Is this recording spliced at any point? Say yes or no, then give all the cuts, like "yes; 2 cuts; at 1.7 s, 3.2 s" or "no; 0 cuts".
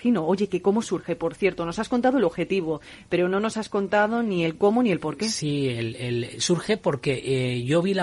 no; 0 cuts